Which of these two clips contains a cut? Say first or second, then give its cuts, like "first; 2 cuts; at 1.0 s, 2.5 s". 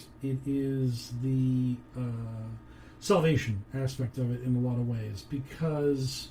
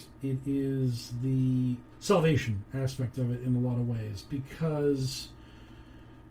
second; 1 cut; at 1.9 s